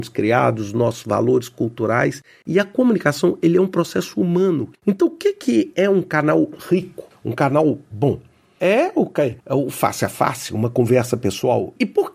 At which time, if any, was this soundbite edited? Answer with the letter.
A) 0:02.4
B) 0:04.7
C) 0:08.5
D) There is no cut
B